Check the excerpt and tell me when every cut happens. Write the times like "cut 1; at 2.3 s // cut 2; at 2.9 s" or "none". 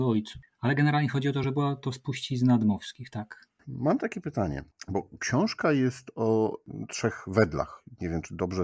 none